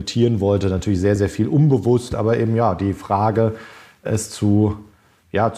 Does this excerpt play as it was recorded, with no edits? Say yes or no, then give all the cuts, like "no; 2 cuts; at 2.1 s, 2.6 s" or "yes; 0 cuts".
yes; 0 cuts